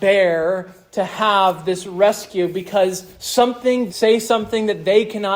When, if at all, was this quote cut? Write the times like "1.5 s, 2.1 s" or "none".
3.9 s